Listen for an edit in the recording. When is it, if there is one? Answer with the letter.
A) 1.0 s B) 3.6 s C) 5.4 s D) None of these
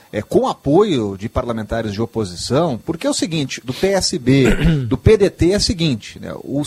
B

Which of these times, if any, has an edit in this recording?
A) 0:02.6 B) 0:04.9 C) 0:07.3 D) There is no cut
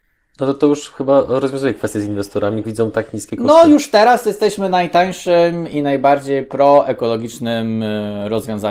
A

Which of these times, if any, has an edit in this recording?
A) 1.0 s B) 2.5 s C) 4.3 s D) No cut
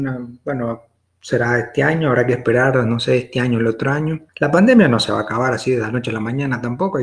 C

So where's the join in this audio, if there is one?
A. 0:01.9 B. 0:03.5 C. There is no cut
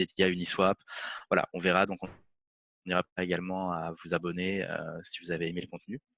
C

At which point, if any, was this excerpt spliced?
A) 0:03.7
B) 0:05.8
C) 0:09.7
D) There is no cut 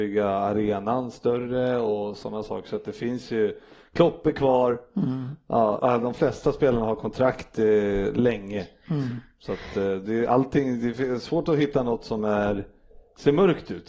B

